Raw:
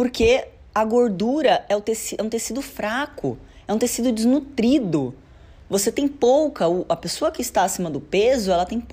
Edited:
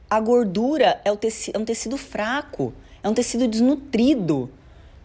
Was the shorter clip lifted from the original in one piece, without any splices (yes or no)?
yes